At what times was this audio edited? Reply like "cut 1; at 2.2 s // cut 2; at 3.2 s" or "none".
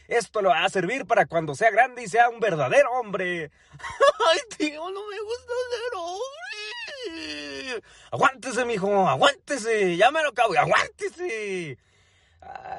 none